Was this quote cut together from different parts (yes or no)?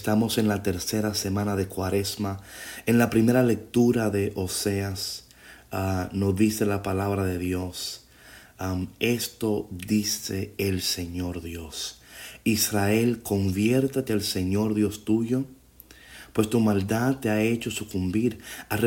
no